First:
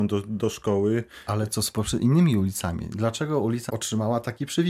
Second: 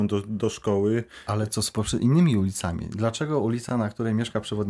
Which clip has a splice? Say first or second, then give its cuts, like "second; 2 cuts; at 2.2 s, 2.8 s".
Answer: first; 1 cut; at 3.7 s